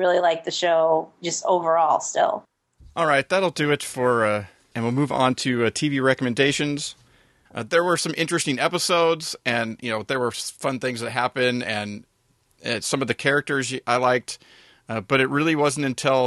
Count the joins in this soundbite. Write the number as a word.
two